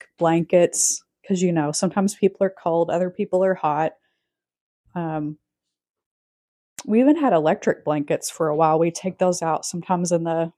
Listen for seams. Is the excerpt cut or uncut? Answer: uncut